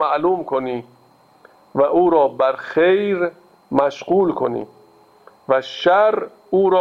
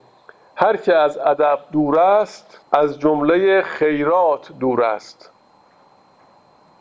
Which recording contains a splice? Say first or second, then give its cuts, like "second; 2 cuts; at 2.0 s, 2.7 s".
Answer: second; 1 cut; at 2.6 s